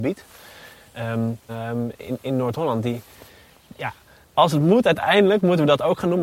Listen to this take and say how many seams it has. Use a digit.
1